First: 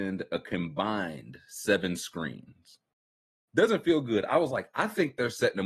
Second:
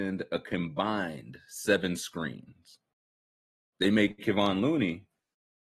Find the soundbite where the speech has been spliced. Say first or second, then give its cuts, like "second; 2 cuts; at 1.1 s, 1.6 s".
first; 1 cut; at 3.4 s